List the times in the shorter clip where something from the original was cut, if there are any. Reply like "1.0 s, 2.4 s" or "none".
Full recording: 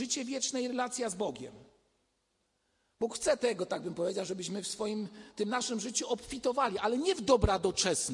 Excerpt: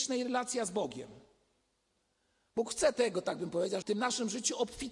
3.8 s